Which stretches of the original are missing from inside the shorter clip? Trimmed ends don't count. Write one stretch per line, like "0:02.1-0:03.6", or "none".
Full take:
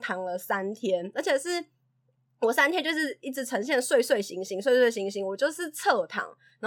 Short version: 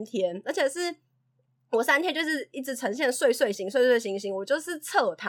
0:04.2-0:04.5

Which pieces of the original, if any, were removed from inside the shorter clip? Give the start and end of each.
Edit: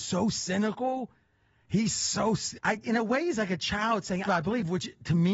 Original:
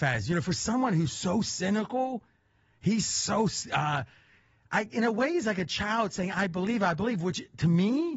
0:03.7-0:04.6
0:06.3-0:06.8

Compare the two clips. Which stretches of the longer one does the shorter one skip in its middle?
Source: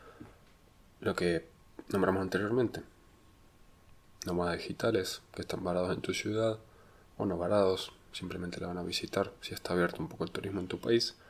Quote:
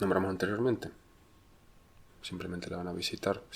0:04.0-0:08.0

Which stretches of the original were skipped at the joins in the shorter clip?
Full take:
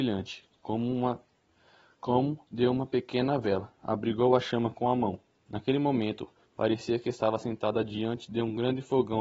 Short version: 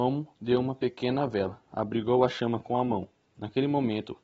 none

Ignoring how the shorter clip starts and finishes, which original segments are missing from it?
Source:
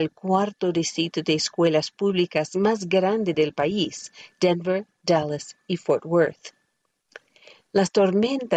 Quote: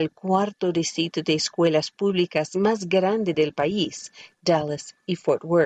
0:04.3-0:04.9

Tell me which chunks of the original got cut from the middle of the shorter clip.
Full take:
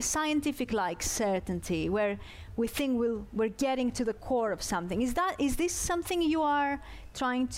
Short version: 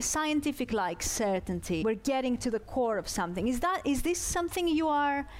0:01.8-0:03.4

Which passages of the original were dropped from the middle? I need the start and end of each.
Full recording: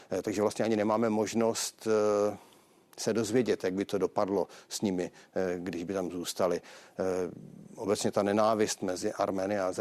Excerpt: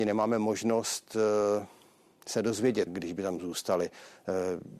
0:03.6-0:05.6

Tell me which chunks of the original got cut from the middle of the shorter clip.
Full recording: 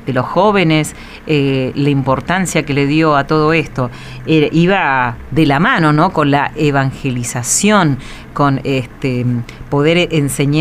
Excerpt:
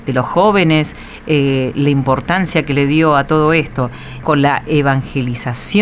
0:04.2-0:06.1

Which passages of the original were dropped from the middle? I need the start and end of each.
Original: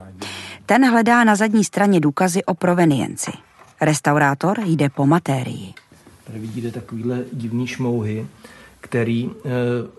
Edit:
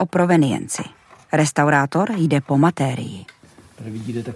none

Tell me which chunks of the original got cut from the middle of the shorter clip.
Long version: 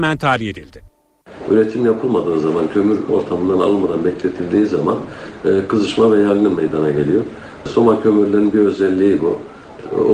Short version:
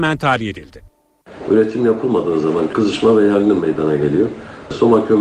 0:02.7-0:05.7

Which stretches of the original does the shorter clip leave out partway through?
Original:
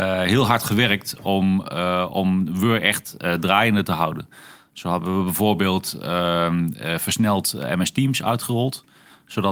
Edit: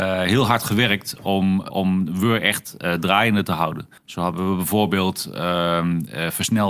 0:01.7-0:02.1
0:04.4-0:04.7

